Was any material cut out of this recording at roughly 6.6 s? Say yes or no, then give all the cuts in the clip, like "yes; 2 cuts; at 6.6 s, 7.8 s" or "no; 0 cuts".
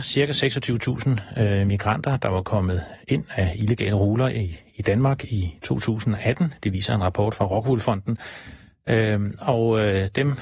no; 0 cuts